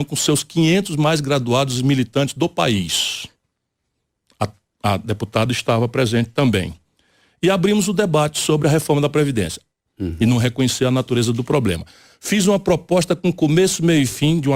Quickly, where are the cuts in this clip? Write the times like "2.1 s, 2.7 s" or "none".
9.9 s